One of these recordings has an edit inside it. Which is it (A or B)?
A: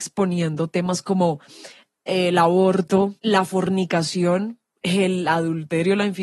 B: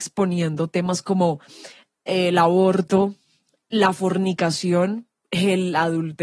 A